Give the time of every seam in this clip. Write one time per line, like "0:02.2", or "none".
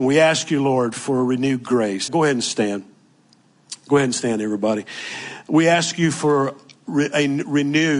0:02.1